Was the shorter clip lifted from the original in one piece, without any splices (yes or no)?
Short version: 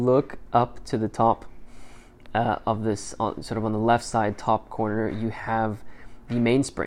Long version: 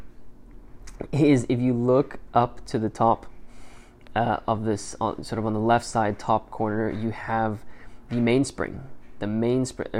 yes